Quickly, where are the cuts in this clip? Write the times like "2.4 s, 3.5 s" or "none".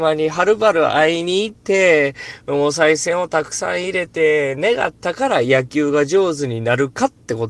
1.6 s